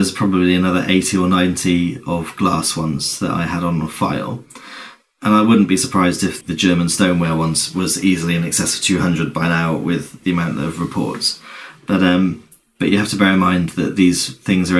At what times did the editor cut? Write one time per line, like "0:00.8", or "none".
0:06.4